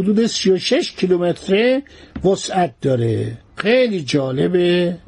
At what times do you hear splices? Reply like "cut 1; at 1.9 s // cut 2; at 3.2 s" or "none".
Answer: cut 1; at 3.5 s